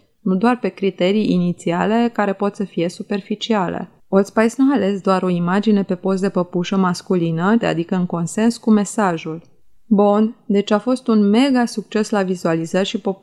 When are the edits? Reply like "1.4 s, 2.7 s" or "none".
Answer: 7.6 s